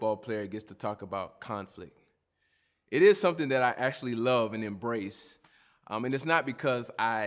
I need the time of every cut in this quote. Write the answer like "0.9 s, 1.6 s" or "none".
none